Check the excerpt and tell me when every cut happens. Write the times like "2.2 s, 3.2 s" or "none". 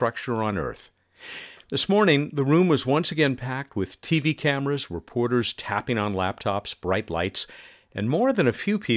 none